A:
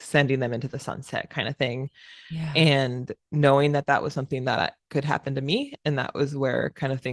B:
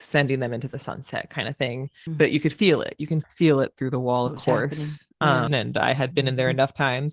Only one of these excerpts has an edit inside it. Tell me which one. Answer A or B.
B